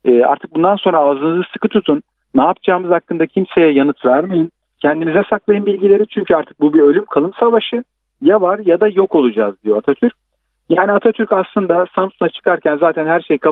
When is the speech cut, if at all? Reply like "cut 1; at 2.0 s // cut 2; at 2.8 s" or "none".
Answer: none